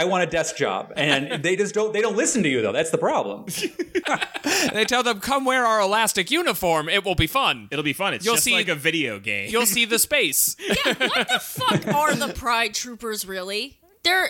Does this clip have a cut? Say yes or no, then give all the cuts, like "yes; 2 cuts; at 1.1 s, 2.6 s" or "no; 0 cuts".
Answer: yes; 1 cut; at 4.0 s